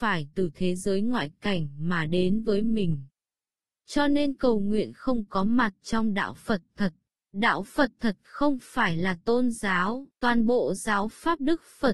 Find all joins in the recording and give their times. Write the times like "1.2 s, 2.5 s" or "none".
7.2 s, 10.2 s